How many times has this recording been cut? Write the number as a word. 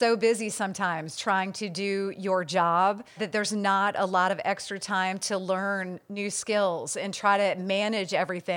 two